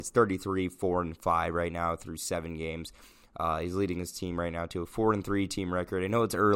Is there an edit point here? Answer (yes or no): no